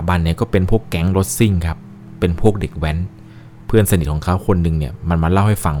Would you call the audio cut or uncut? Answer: uncut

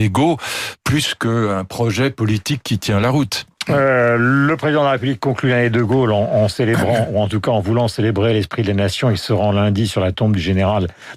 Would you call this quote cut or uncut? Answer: uncut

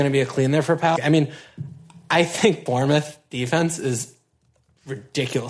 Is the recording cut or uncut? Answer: cut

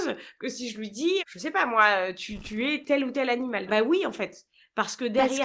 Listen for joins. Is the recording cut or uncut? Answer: cut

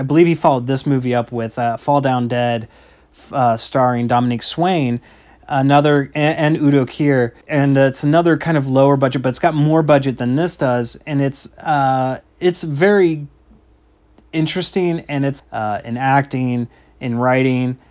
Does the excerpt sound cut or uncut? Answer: cut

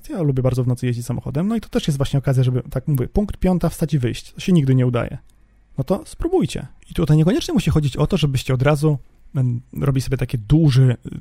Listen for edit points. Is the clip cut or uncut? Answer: cut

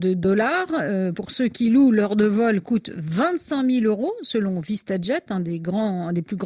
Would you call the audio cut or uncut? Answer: uncut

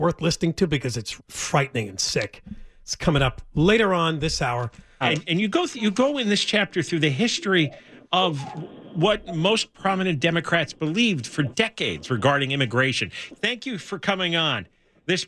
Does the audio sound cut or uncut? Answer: cut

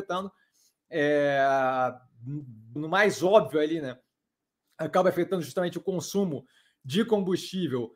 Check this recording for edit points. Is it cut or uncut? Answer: cut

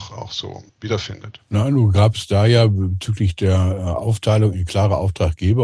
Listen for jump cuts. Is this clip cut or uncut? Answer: uncut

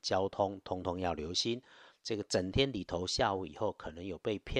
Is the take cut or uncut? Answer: cut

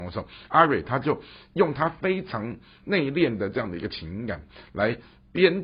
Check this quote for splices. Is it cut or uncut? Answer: uncut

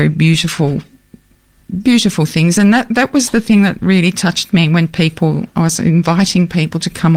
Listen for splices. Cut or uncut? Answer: uncut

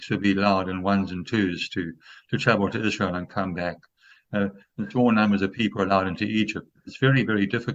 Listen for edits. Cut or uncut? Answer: uncut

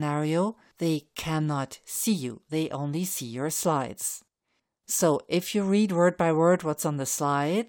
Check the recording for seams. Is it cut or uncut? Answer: uncut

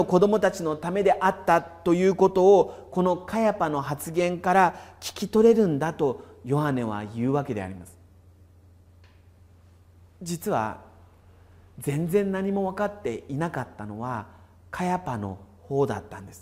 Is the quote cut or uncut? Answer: uncut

